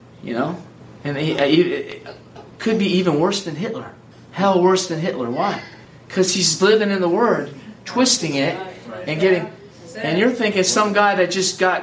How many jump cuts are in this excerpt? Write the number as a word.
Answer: zero